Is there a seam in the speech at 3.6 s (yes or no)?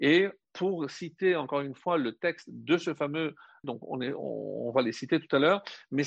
yes